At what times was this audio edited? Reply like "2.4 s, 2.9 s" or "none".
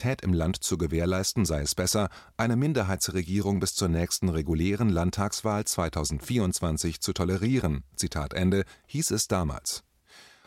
none